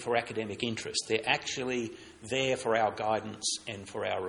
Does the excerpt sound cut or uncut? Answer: uncut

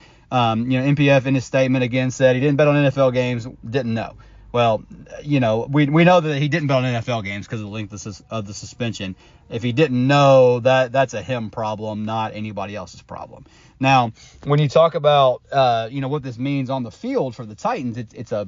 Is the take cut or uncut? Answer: uncut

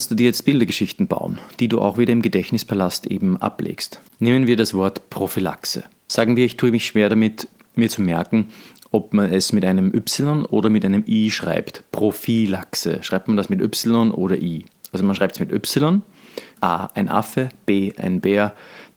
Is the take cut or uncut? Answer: cut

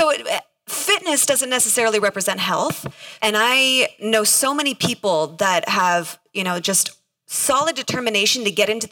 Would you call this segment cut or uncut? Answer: cut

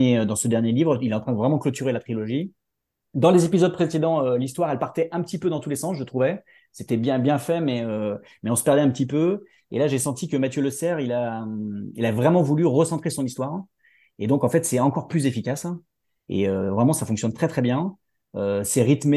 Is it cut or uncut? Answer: uncut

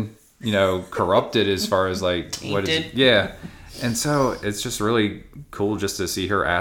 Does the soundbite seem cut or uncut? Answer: uncut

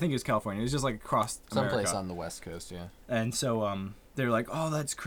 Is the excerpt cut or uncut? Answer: cut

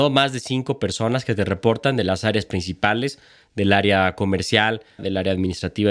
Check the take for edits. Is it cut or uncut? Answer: cut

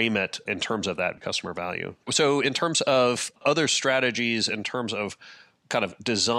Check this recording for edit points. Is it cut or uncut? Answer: cut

